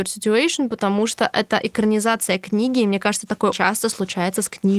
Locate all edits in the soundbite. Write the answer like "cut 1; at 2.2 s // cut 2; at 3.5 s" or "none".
cut 1; at 3.5 s